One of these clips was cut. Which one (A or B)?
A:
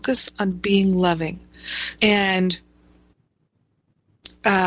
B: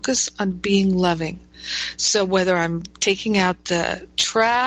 A